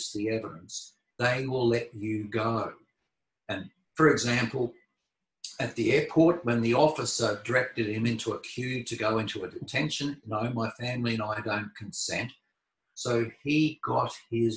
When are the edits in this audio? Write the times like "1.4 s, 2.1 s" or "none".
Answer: 10.2 s, 12.8 s